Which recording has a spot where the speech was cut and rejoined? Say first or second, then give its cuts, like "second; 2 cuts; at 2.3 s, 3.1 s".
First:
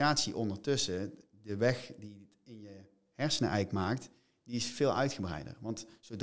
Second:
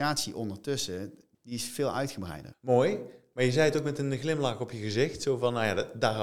second; 2 cuts; at 1.3 s, 2.5 s